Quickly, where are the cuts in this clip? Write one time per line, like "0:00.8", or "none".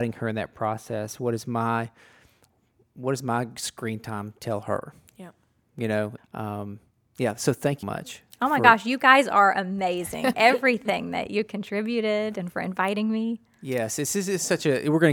0:06.2
0:07.8
0:10.3